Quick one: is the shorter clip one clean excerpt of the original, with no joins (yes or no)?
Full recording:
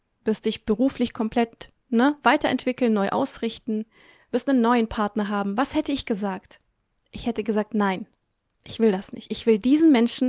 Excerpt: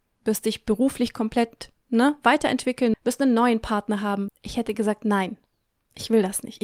no